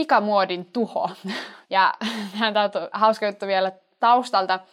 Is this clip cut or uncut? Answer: cut